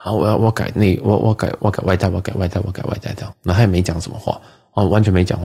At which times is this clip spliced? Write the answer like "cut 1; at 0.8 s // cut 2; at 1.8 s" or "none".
cut 1; at 1.6 s // cut 2; at 3.3 s